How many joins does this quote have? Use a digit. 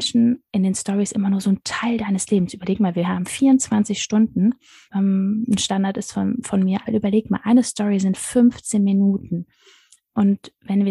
2